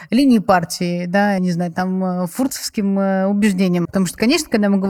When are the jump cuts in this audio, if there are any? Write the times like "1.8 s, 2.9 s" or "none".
1.4 s, 3.8 s

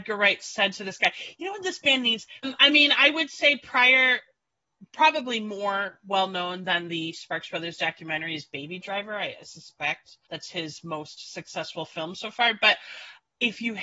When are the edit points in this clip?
2.4 s, 10.2 s

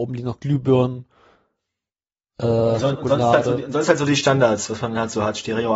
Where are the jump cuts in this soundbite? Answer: none

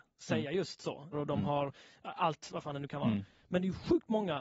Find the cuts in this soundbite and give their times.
1.1 s

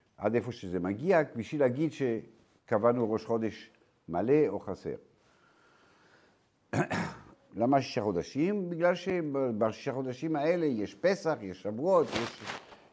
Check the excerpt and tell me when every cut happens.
7.5 s

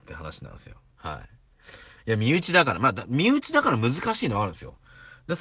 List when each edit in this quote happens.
0.9 s

